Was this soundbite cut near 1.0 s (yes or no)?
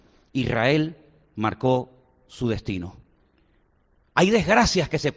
no